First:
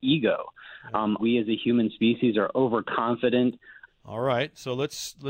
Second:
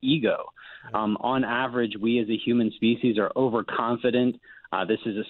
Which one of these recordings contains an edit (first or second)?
first